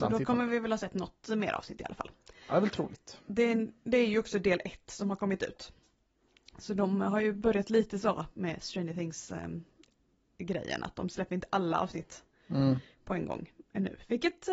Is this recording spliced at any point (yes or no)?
no